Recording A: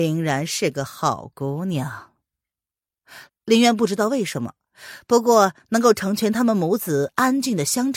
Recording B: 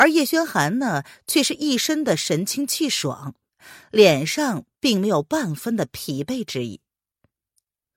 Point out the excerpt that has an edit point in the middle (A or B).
A